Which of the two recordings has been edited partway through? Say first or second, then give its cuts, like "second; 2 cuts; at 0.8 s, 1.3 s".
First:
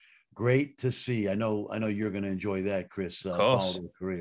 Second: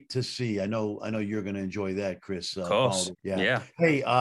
second; 1 cut; at 3.1 s